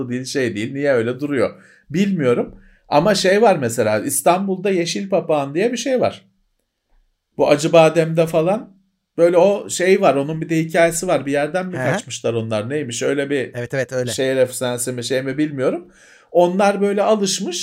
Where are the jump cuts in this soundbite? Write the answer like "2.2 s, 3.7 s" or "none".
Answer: none